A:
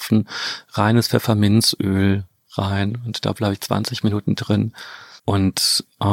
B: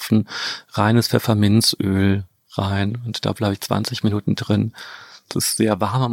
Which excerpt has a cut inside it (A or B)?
A